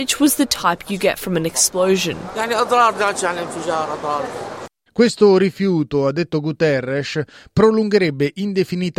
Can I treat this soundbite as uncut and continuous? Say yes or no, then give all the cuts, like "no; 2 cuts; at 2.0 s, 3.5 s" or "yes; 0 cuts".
no; 1 cut; at 4.9 s